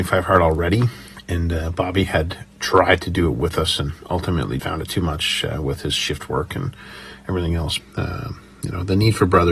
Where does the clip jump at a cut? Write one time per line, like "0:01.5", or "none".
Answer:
0:04.6
0:07.8